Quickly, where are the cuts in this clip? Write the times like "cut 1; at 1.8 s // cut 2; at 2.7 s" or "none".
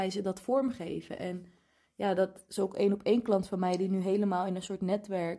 none